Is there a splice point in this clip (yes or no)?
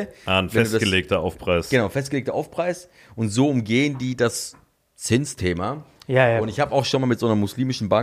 no